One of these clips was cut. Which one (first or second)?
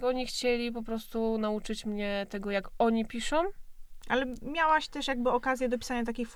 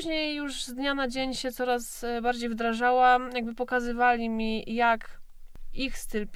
first